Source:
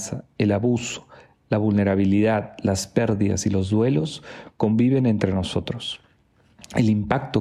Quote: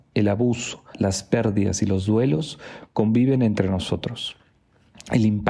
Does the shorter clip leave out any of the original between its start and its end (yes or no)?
yes